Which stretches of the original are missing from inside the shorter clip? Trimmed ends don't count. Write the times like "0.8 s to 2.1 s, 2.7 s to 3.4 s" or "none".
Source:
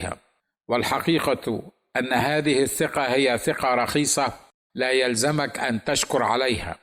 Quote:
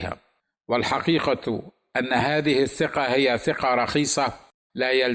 none